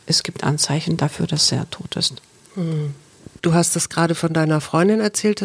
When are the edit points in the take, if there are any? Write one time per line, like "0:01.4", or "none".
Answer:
0:03.4